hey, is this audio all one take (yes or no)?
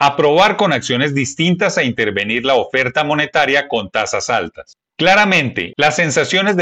no